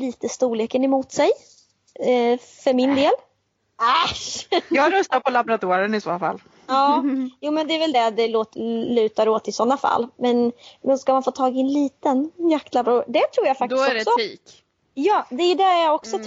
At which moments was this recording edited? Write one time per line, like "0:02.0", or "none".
none